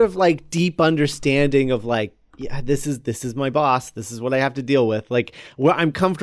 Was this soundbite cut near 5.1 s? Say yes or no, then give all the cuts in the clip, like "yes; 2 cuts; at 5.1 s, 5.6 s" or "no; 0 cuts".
no; 0 cuts